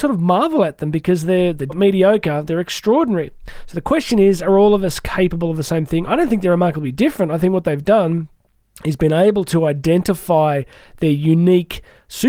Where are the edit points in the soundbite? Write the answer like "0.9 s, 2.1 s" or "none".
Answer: 1.7 s, 6.1 s